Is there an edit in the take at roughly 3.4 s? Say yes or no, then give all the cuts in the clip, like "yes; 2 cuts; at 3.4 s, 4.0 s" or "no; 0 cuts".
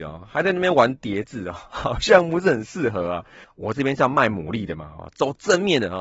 yes; 1 cut; at 3.4 s